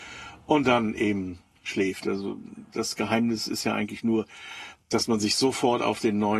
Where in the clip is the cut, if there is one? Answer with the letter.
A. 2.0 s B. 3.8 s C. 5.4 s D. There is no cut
A